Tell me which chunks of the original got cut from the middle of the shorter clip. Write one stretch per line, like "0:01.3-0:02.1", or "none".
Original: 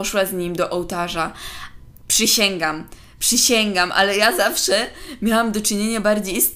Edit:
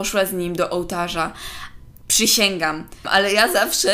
0:03.0-0:03.9